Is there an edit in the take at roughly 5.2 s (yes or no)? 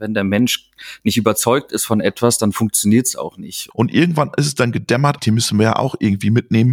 yes